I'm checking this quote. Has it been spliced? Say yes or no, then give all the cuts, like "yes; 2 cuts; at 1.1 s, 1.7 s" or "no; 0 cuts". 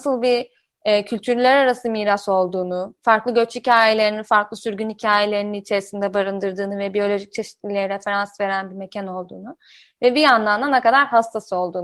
no; 0 cuts